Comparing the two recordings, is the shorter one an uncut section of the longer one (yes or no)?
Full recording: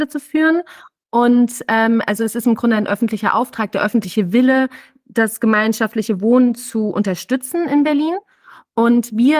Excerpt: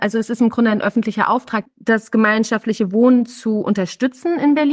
no